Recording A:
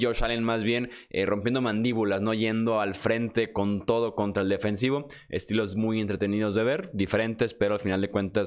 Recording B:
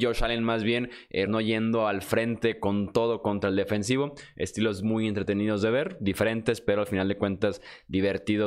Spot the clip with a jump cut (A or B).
B